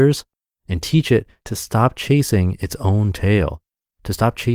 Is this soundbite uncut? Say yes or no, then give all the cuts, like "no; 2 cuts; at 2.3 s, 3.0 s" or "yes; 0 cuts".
yes; 0 cuts